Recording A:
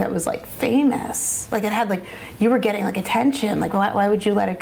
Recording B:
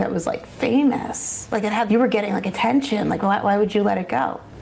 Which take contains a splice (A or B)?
B